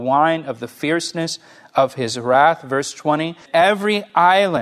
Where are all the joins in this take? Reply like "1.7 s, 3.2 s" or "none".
3.5 s